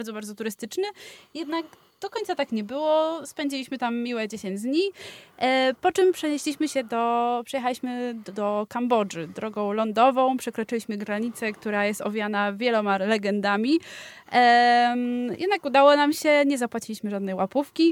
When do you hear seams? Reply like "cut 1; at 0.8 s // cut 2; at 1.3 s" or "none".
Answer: none